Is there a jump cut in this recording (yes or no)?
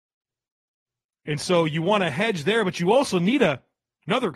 no